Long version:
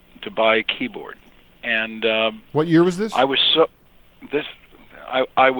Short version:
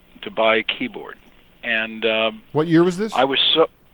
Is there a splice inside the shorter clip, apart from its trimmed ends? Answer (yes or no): no